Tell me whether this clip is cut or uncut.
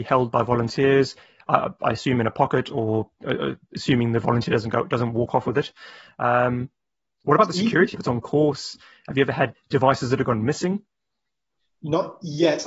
cut